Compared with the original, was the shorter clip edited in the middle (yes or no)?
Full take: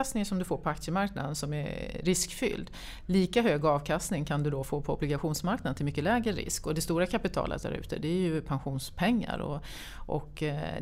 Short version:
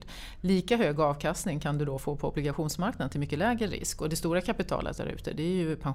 no